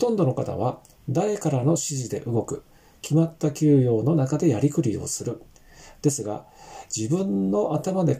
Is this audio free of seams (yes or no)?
yes